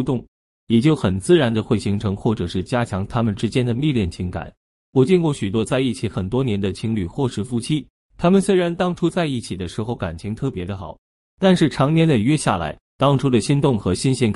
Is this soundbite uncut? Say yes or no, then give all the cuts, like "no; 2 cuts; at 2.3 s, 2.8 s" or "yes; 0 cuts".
yes; 0 cuts